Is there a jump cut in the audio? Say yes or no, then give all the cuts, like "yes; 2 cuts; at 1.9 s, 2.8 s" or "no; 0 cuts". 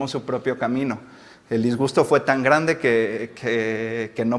no; 0 cuts